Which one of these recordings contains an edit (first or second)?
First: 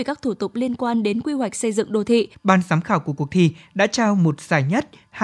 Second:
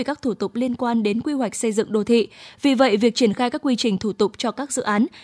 first